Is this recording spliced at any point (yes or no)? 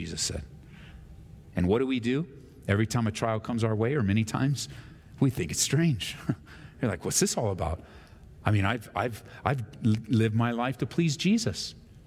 yes